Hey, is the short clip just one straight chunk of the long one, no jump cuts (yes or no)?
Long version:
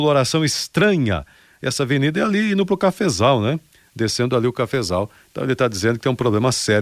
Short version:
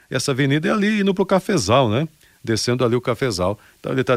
yes